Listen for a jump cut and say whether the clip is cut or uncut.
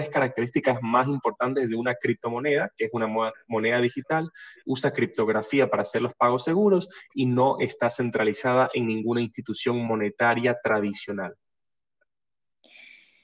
uncut